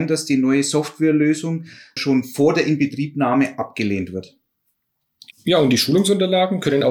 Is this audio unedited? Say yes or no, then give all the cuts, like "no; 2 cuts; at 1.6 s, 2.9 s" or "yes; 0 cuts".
no; 2 cuts; at 2.0 s, 5.3 s